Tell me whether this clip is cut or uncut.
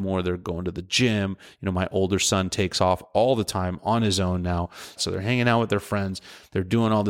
cut